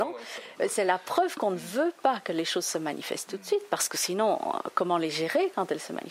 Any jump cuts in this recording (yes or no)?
no